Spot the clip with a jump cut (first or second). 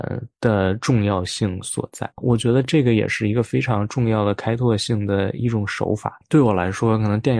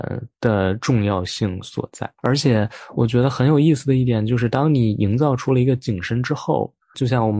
first